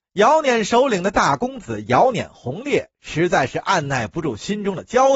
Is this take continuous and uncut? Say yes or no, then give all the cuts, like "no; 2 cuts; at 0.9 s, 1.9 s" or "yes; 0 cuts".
yes; 0 cuts